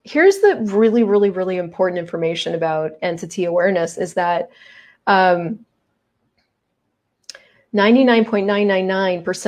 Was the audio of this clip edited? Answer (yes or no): no